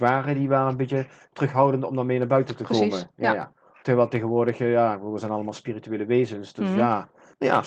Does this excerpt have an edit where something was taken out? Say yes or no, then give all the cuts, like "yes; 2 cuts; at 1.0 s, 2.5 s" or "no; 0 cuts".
no; 0 cuts